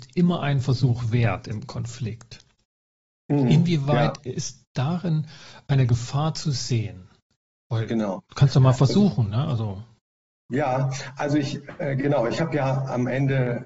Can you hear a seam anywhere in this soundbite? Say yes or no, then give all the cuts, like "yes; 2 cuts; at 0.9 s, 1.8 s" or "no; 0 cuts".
no; 0 cuts